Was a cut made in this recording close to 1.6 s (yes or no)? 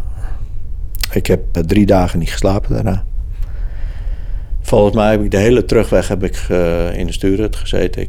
yes